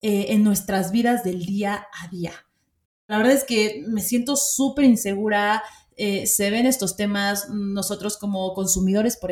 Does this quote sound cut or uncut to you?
cut